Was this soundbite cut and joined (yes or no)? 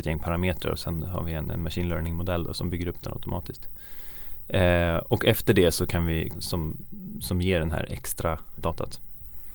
yes